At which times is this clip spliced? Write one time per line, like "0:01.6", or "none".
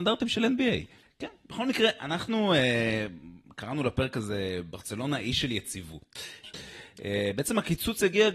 0:01.0
0:06.4